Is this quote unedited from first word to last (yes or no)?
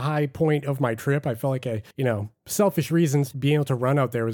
no